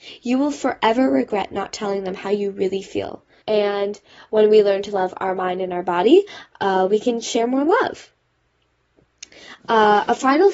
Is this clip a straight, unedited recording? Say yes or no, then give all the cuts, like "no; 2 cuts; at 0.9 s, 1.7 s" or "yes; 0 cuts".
no; 1 cut; at 3.4 s